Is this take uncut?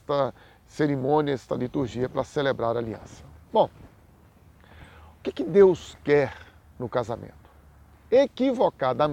no; 1 cut; at 8.1 s

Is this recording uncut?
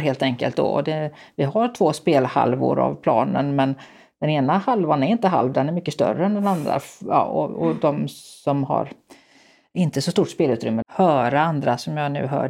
no; 1 cut; at 10.8 s

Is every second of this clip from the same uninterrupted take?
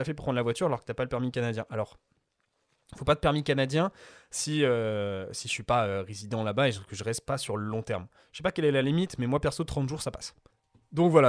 yes; 0 cuts

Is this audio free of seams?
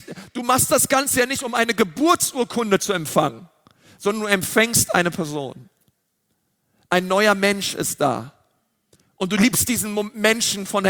yes; 0 cuts

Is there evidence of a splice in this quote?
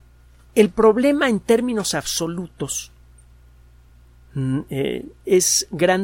no; 0 cuts

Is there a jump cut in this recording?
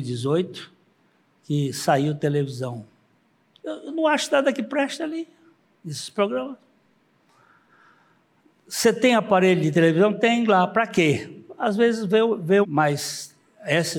yes; 1 cut; at 12.6 s

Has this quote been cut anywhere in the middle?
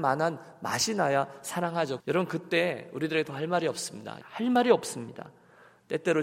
yes; 2 cuts; at 2.0 s, 4.2 s

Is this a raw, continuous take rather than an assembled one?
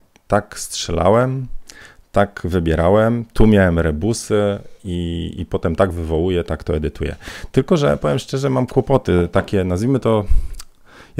yes; 0 cuts

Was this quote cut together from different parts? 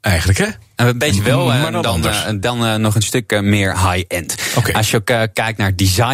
no; 0 cuts

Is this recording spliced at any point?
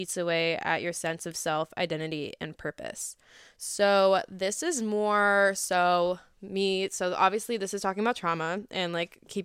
no; 0 cuts

